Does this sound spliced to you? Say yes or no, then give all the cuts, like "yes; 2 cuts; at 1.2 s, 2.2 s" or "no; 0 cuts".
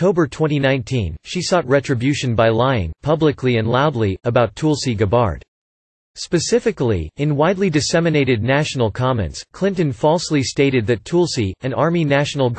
no; 0 cuts